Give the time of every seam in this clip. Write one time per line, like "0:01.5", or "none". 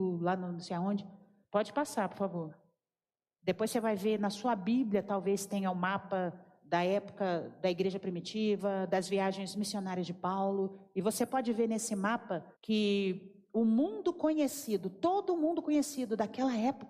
0:01.4
0:03.4
0:12.5